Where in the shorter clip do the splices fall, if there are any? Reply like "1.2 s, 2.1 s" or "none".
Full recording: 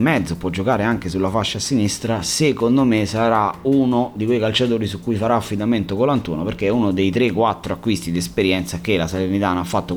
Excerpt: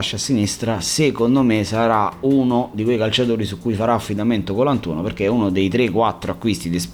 none